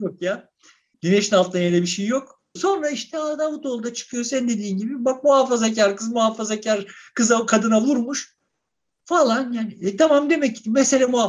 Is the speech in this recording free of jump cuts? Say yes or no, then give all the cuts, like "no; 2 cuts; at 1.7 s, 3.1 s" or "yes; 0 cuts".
no; 1 cut; at 2.6 s